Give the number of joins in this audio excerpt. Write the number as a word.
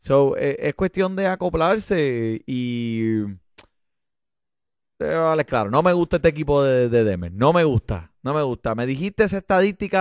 zero